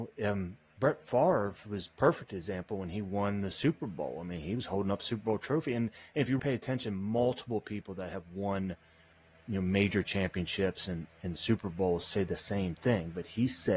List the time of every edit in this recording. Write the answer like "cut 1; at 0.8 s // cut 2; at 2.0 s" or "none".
cut 1; at 6.4 s